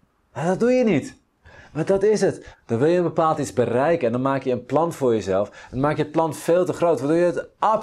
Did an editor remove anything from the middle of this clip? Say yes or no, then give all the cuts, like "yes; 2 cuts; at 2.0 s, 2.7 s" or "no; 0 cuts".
yes; 1 cut; at 2.5 s